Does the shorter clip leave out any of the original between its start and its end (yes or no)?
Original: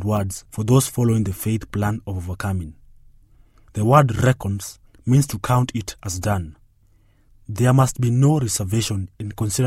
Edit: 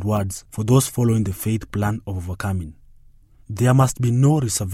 yes